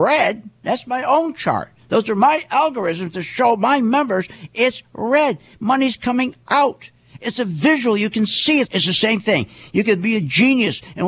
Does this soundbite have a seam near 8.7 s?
yes; 1 cut; at 8.7 s

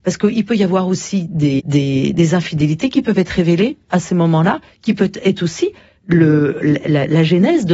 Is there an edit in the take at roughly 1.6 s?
yes; 1 cut; at 1.6 s

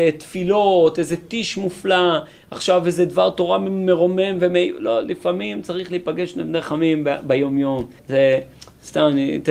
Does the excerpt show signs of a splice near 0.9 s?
no; 1 cut; at 8.0 s

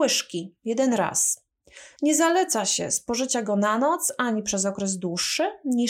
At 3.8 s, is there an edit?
no; 1 cut; at 2.0 s

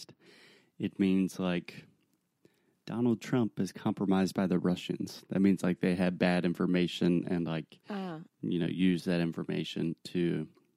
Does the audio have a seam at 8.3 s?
yes; 1 cut; at 8.3 s

